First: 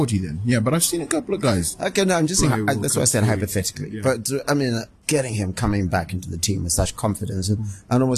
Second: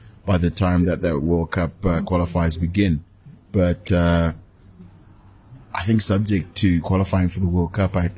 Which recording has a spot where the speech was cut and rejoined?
first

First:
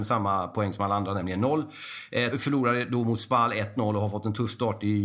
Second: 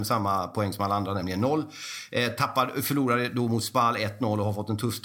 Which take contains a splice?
first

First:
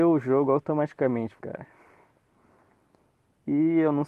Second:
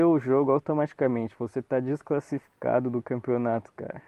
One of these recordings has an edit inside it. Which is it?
first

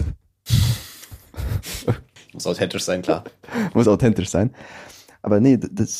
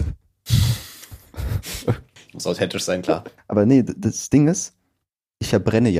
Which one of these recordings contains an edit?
second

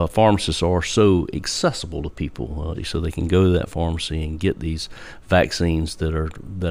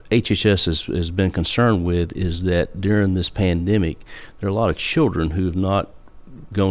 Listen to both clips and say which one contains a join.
first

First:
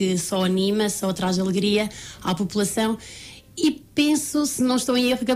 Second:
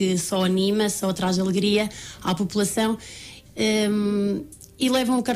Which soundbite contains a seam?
second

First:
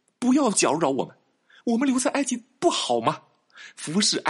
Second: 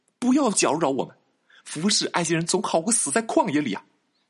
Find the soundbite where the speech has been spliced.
second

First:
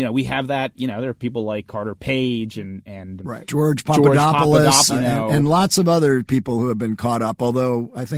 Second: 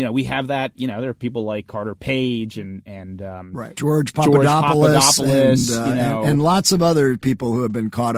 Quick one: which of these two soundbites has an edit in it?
first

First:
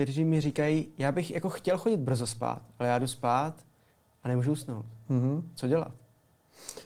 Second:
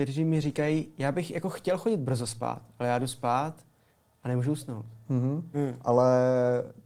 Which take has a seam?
second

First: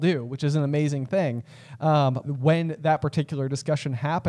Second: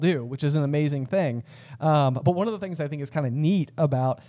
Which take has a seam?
first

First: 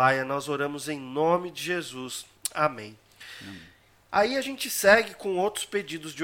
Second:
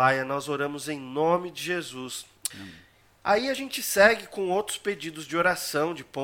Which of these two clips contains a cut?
second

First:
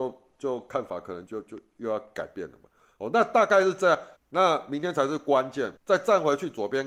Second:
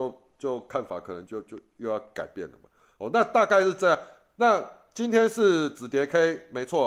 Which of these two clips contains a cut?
first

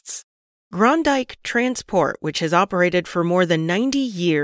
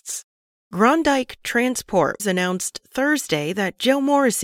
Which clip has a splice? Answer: second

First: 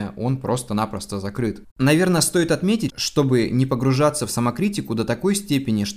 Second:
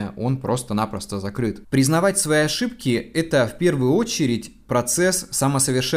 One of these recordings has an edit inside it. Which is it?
first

